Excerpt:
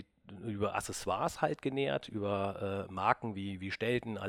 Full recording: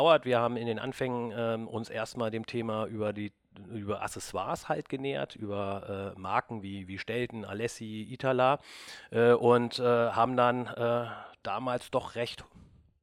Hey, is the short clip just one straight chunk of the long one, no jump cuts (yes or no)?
yes